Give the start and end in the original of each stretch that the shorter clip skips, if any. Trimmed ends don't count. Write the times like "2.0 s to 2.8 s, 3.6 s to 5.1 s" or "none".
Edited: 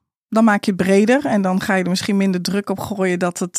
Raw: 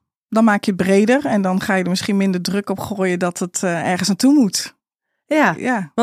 none